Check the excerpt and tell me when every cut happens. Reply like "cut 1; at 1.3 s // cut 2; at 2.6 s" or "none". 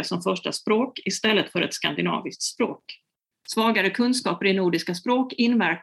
cut 1; at 3.3 s